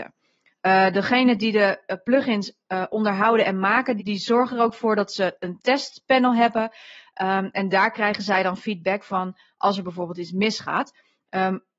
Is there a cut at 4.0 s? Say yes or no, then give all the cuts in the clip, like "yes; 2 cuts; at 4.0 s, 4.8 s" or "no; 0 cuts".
yes; 1 cut; at 4.0 s